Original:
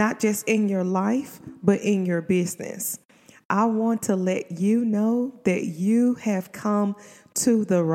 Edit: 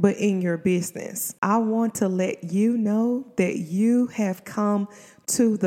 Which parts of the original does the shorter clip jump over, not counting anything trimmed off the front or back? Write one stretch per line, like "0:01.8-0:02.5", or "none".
0:03.0-0:03.5